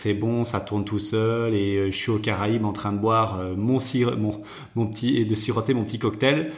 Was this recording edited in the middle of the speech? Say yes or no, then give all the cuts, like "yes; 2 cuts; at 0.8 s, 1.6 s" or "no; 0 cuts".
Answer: no; 0 cuts